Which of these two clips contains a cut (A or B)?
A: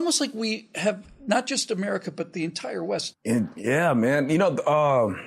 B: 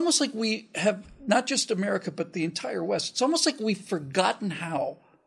A